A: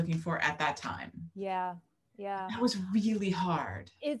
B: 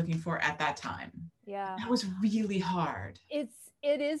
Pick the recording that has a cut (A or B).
B